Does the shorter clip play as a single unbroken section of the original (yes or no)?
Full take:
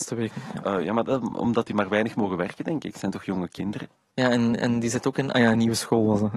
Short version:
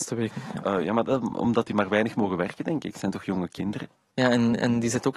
yes